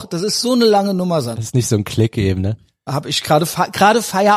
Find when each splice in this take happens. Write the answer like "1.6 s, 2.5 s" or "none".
1.3 s, 2.9 s